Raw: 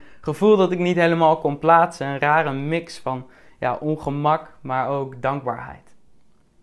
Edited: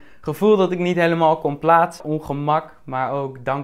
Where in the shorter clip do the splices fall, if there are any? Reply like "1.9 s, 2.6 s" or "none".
2.0 s